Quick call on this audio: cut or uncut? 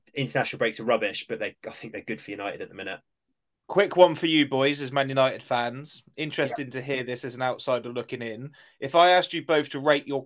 uncut